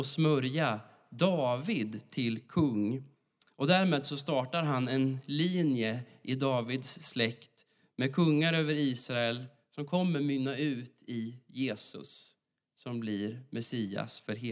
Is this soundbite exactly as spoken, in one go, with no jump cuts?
yes; 0 cuts

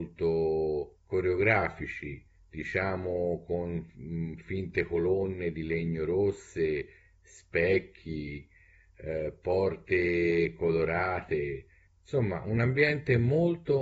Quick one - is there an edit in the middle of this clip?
no; 0 cuts

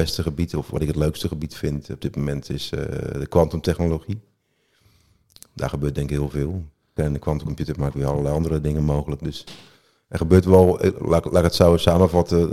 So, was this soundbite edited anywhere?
yes; 1 cut; at 7.0 s

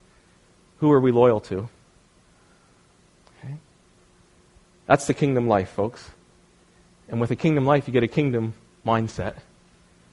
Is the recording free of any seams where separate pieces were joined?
yes; 0 cuts

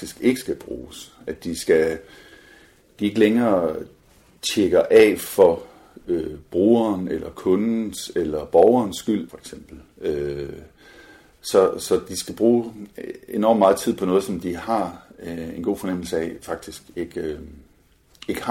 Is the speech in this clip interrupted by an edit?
yes; 1 cut; at 9.3 s

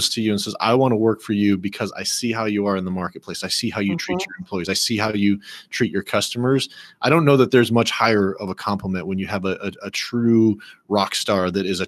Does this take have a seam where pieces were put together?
no; 0 cuts

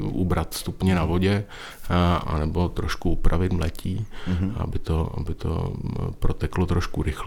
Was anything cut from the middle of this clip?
yes; 1 cut; at 2.2 s

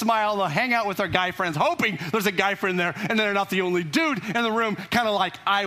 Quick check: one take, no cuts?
yes; 0 cuts

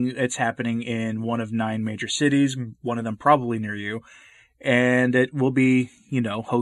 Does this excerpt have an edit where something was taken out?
no; 0 cuts

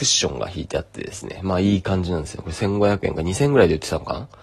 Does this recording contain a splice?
no; 0 cuts

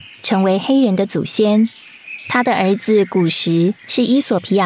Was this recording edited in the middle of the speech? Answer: no; 0 cuts

